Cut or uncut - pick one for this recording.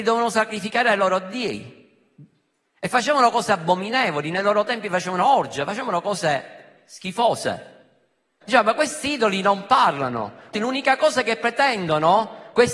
cut